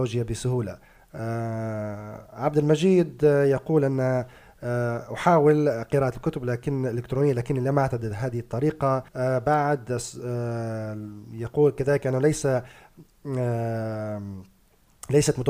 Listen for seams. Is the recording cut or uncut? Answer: cut